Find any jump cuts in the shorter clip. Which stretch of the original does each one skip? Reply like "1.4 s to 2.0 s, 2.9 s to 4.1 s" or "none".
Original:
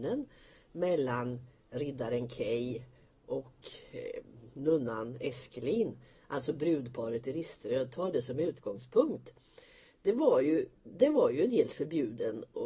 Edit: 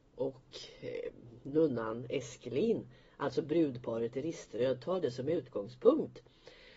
none